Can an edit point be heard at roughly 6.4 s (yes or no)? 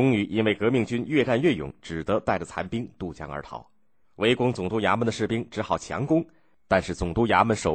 no